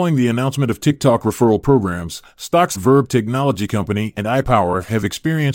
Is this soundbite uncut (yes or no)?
no